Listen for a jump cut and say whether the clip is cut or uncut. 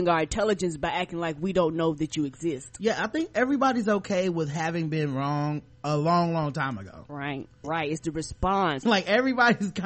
cut